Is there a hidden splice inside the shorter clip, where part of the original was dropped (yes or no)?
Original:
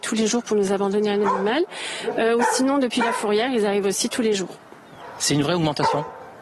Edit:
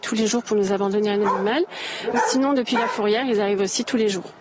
yes